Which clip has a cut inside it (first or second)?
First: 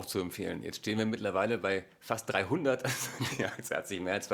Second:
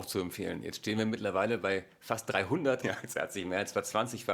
second